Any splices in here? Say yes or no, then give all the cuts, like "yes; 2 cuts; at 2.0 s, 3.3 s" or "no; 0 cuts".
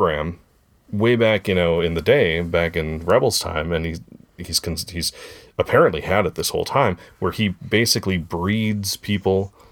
no; 0 cuts